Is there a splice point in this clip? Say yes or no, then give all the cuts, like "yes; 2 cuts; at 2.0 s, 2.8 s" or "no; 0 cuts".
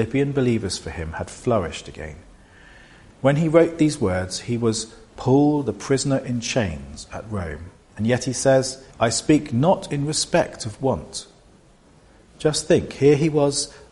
yes; 1 cut; at 8.9 s